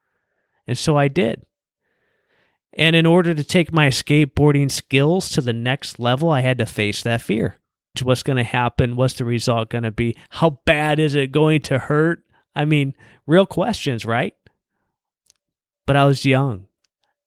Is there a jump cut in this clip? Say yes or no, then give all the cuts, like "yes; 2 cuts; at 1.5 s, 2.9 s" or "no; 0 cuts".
yes; 1 cut; at 7.9 s